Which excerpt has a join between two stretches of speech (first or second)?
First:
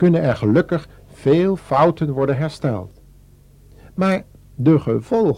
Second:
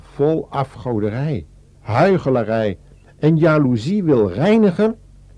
second